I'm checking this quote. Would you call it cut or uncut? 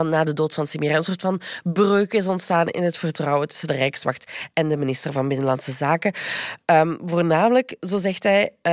uncut